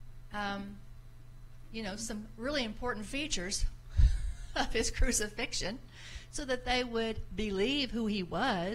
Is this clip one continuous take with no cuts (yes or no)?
yes